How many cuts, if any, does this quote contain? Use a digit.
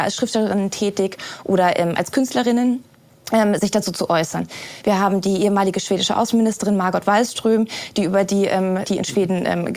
2